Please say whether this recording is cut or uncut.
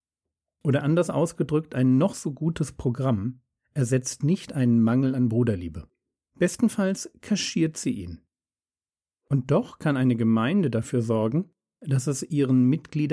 uncut